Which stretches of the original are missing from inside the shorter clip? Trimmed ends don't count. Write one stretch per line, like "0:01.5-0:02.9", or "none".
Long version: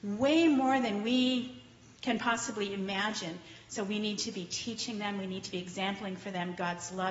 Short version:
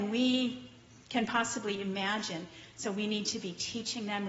none